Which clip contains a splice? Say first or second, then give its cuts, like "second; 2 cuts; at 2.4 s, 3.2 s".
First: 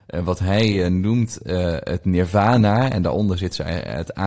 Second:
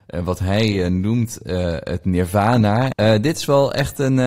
second; 1 cut; at 2.9 s